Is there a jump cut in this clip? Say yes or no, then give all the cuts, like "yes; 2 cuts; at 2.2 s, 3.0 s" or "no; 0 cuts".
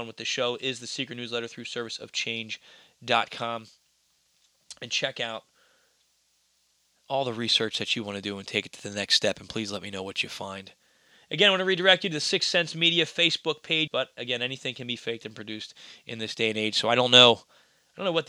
yes; 1 cut; at 13.9 s